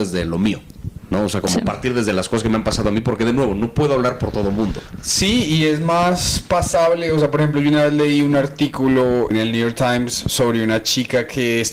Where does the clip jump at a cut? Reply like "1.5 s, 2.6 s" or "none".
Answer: 9.3 s